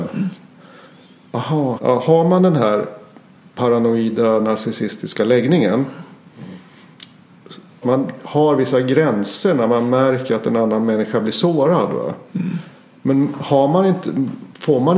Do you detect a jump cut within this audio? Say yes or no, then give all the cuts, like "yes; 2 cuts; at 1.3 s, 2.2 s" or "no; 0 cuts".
yes; 2 cuts; at 1.8 s, 7.8 s